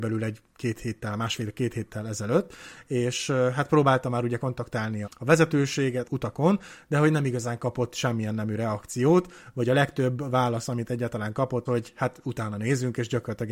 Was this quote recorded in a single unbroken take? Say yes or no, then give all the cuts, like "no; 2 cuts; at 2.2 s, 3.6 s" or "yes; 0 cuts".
no; 3 cuts; at 5.0 s, 6.0 s, 11.7 s